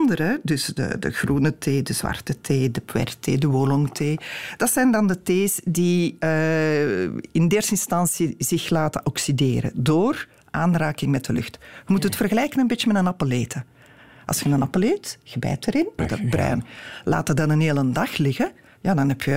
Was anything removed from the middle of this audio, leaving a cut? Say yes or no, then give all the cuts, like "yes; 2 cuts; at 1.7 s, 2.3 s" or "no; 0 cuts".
yes; 1 cut; at 16.0 s